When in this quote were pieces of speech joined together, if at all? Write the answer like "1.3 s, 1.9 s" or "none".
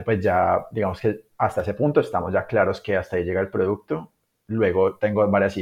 none